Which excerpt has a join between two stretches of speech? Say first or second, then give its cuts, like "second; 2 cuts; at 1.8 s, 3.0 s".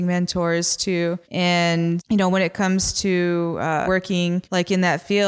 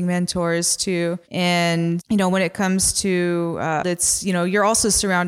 second; 1 cut; at 3.8 s